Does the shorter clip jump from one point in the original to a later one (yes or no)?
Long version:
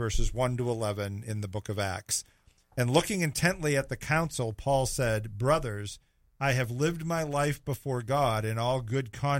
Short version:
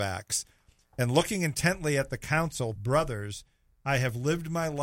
yes